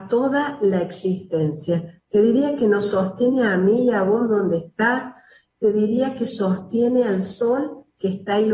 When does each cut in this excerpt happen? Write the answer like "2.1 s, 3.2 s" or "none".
none